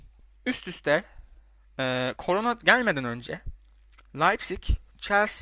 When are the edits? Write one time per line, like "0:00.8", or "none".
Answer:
none